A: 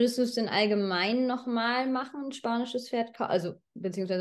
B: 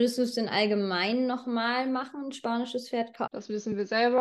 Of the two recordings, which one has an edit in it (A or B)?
B